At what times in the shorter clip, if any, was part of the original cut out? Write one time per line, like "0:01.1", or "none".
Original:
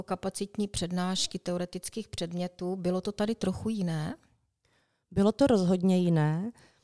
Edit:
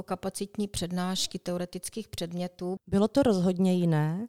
0:02.8